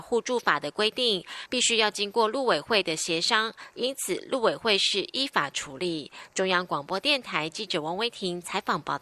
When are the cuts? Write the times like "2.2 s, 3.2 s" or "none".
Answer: 1.5 s